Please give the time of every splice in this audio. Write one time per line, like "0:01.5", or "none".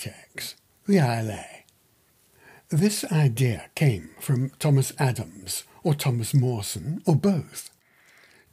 none